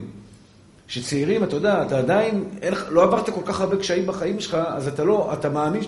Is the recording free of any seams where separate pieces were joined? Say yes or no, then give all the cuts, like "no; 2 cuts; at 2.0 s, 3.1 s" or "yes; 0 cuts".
yes; 0 cuts